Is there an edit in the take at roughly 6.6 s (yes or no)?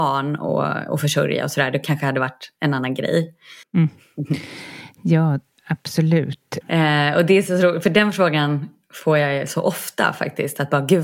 yes